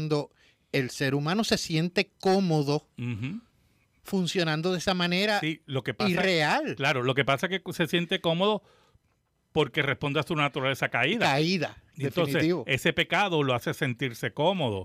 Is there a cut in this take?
yes; 1 cut; at 11.9 s

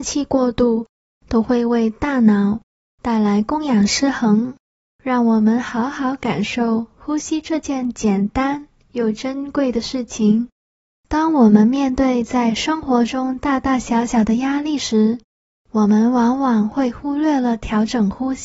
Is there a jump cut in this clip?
yes; 2 cuts; at 5.0 s, 11.0 s

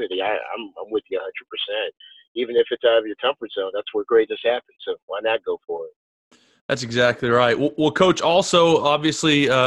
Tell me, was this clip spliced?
no; 0 cuts

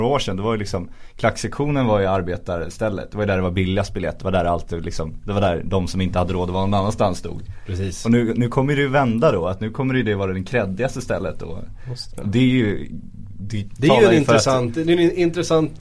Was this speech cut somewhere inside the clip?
no; 0 cuts

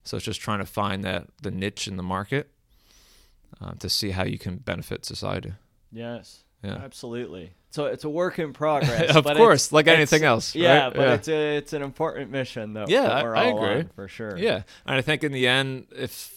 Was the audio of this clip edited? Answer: no; 0 cuts

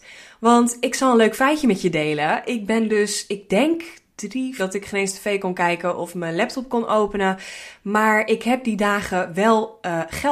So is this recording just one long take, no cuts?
no; 1 cut; at 4.6 s

